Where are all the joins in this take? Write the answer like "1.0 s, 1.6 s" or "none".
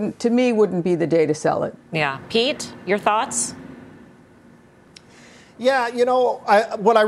1.8 s